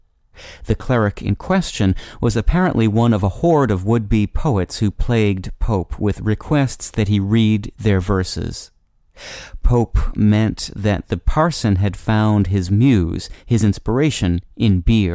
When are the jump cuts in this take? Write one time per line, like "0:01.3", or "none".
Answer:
none